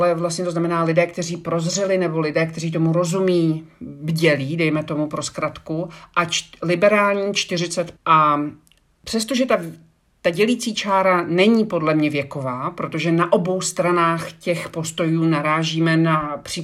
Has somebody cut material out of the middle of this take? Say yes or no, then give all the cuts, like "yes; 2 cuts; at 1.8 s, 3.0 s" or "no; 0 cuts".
yes; 1 cut; at 8.0 s